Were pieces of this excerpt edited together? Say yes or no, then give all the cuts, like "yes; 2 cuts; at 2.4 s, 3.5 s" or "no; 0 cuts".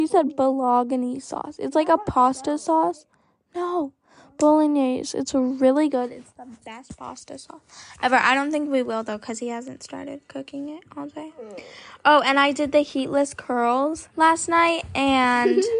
yes; 1 cut; at 14.1 s